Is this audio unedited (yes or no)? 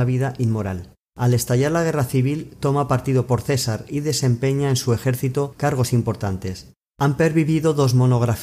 yes